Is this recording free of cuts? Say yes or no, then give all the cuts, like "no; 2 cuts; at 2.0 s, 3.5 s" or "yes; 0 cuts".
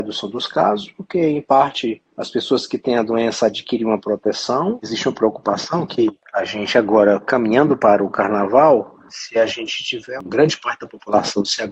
no; 1 cut; at 10.2 s